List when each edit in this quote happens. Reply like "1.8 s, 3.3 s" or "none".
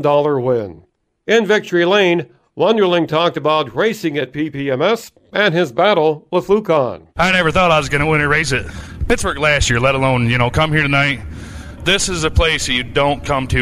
11.8 s

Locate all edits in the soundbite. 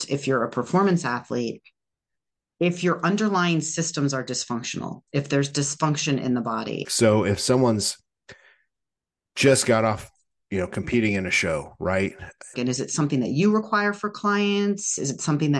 6.8 s, 12.5 s

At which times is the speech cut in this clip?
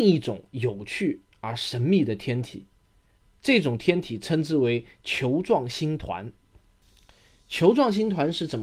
none

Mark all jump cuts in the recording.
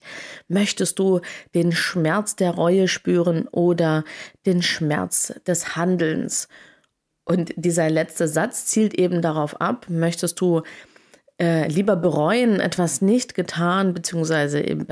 none

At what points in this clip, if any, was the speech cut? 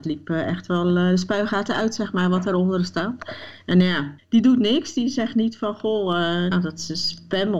4.2 s, 6.5 s

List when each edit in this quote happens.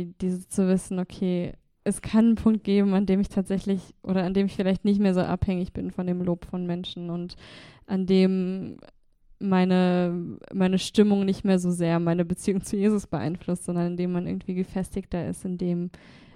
1.8 s

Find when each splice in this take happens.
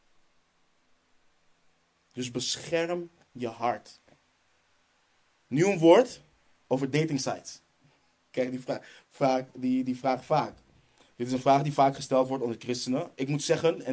none

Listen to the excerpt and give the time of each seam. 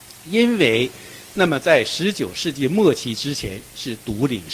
1.3 s

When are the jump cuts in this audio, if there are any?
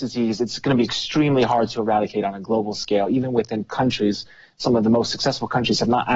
none

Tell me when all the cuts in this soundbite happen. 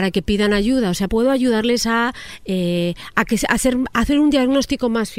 1.1 s

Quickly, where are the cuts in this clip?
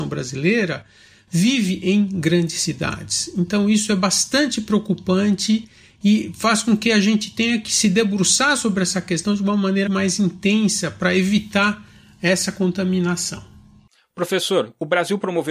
9.9 s

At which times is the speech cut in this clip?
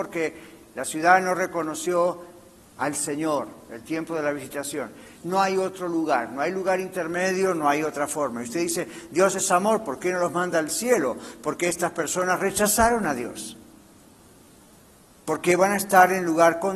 5.1 s

